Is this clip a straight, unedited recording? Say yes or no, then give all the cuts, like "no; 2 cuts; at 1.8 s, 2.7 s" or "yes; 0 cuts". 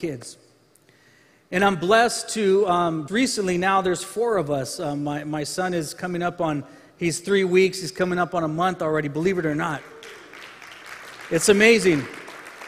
no; 1 cut; at 3.1 s